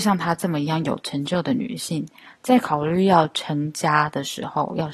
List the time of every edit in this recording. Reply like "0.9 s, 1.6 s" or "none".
none